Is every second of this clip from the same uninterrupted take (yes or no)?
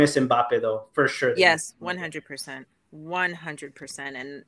yes